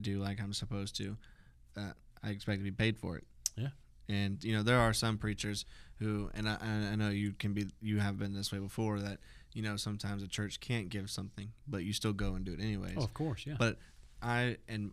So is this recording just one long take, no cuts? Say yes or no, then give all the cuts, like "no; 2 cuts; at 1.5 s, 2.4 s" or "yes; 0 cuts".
yes; 0 cuts